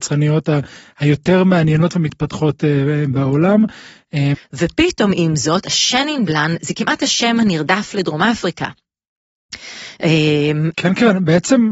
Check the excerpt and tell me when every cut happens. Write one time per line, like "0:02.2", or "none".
0:04.3
0:10.7